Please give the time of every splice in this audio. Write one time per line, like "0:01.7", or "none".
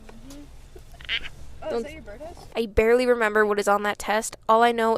0:02.5